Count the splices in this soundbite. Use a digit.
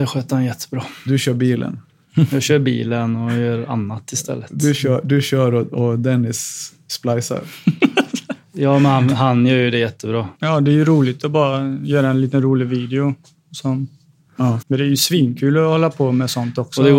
2